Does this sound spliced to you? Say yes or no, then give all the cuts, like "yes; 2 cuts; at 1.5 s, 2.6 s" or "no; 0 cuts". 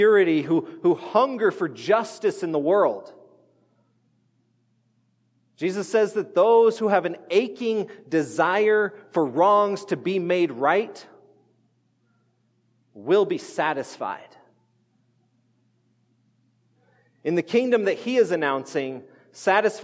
no; 0 cuts